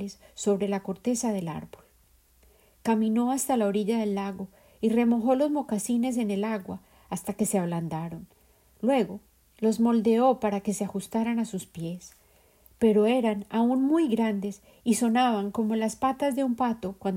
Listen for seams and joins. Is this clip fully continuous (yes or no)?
yes